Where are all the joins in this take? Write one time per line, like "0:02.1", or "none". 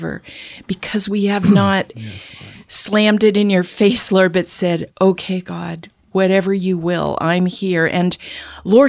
none